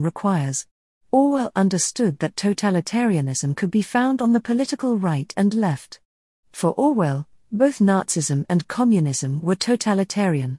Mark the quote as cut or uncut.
uncut